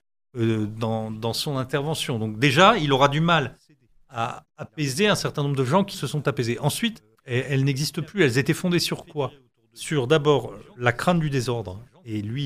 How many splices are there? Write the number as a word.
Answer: two